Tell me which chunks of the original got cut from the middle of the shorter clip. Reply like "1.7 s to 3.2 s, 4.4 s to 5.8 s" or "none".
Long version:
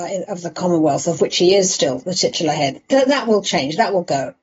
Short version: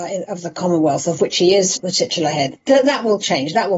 1.8 s to 2.0 s

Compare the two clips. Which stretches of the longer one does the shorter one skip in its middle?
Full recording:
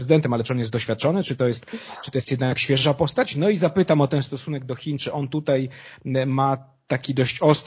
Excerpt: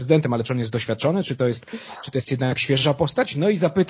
none

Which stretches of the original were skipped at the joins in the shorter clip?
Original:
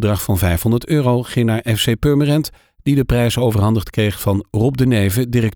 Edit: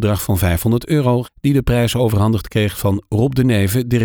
1.2 s to 2.7 s

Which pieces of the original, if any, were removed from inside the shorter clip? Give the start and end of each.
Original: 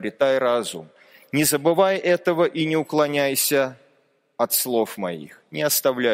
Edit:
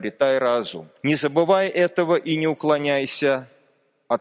1.0 s to 1.3 s

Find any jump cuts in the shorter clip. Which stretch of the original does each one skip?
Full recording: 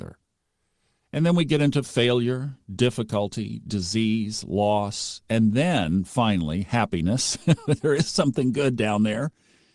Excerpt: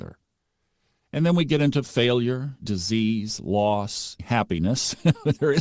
2.6 s to 3.6 s, 5.2 s to 6.6 s

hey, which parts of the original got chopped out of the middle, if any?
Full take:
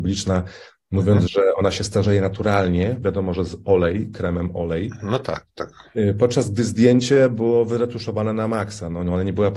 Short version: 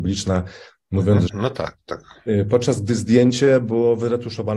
1.3 s to 5.0 s

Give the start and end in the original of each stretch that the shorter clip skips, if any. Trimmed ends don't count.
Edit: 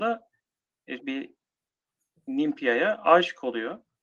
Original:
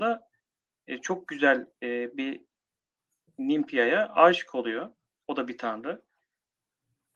1.0 s to 2.1 s

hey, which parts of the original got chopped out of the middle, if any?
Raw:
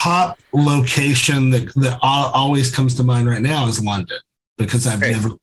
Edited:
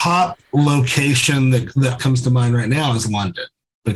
2.0 s to 2.7 s

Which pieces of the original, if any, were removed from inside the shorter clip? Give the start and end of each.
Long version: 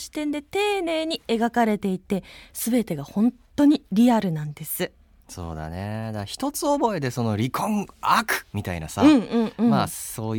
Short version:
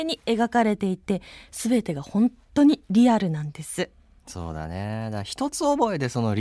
none

